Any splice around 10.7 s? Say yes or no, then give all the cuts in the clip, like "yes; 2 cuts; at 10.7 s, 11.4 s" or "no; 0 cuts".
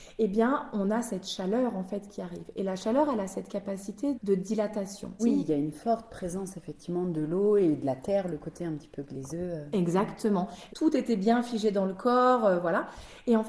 yes; 3 cuts; at 4.1 s, 5.2 s, 10.7 s